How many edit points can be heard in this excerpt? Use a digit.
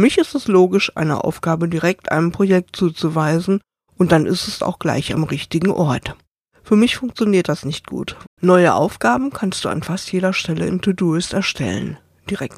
2